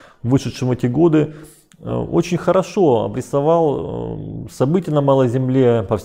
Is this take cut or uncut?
uncut